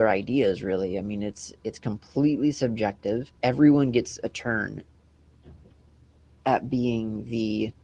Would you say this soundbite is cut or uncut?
cut